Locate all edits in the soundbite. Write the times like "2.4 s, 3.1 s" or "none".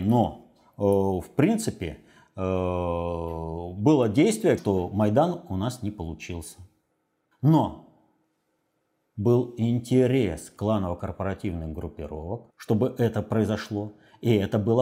4.6 s, 7.3 s, 12.5 s